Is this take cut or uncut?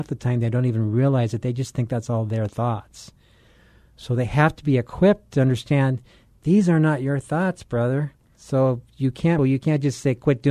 cut